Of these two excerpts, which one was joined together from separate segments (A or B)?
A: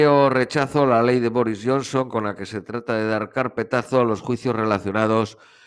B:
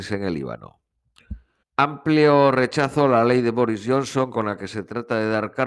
B